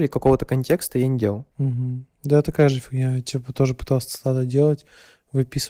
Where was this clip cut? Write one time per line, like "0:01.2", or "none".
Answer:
0:01.5